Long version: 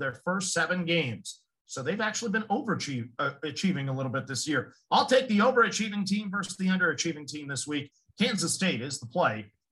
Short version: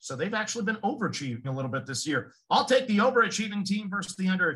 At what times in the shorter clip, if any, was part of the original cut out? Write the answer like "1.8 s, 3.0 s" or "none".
1.4 s